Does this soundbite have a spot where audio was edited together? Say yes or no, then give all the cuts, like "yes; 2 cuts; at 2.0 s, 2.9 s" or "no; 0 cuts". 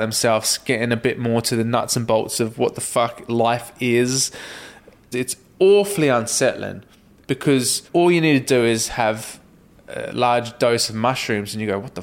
yes; 2 cuts; at 5.1 s, 7.9 s